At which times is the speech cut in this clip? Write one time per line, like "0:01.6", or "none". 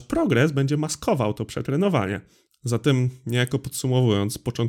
0:02.5

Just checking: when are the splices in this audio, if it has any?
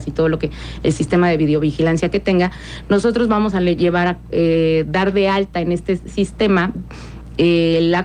none

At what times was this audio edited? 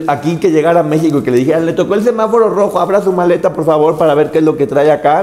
none

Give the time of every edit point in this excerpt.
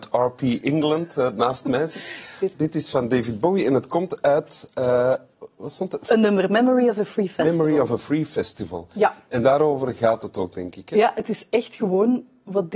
0:02.5

